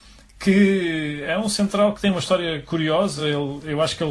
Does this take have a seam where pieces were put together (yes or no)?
no